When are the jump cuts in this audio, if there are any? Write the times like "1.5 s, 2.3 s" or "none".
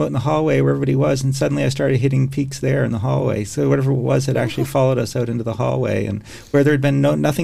none

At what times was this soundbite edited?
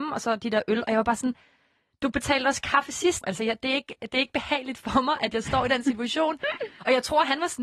3.2 s

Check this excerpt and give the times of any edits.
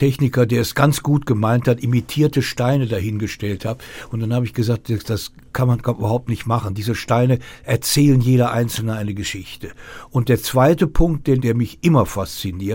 11.4 s

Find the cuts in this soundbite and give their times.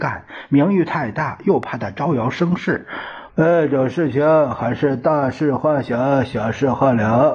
3.3 s

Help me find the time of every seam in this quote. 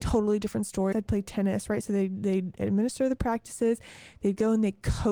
0.9 s

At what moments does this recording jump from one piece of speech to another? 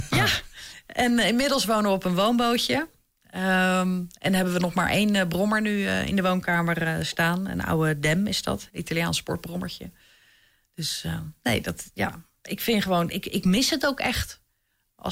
8.7 s

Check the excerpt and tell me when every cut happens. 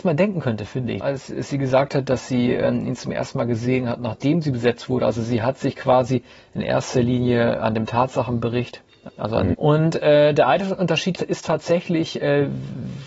1.0 s, 9.5 s, 11.1 s

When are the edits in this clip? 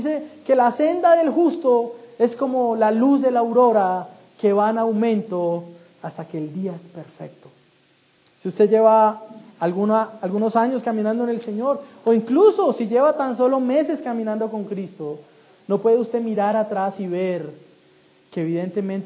none

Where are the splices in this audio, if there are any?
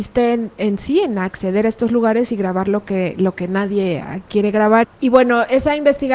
4.8 s

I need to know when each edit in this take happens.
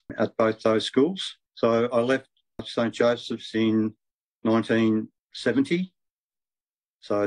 1.5 s

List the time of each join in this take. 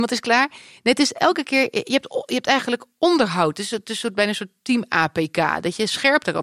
none

